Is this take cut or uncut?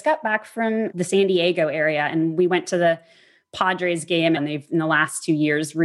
cut